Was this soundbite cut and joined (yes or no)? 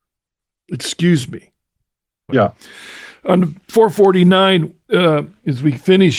yes